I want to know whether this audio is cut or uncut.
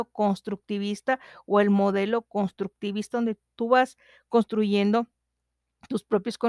uncut